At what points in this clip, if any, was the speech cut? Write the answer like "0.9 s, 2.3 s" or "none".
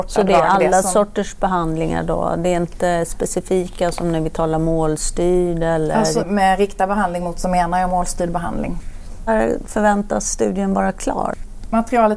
6.2 s